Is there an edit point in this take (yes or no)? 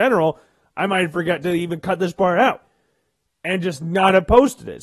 no